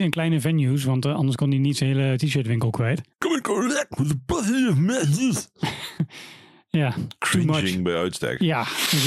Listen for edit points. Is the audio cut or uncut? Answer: cut